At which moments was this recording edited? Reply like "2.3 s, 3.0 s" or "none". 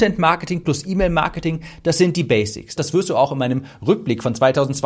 2.8 s

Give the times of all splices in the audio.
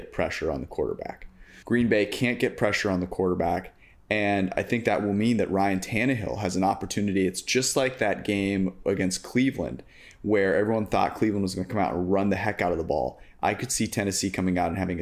1.6 s

